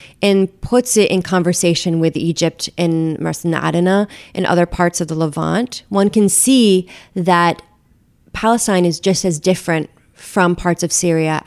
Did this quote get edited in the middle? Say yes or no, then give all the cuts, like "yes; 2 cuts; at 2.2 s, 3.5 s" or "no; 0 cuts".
no; 0 cuts